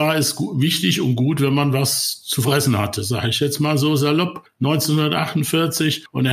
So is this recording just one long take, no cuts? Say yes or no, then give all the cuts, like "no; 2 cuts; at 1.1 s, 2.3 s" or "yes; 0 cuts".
yes; 0 cuts